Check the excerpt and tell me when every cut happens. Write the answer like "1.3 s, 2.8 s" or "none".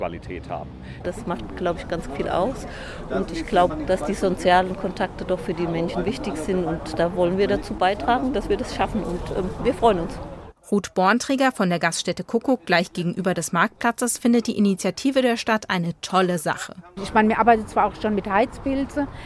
1.0 s, 8.3 s